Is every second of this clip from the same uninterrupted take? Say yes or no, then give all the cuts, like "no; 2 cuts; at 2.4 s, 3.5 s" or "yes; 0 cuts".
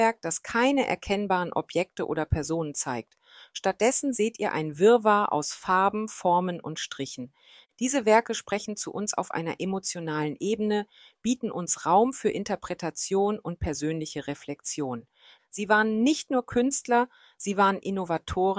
no; 1 cut; at 15.4 s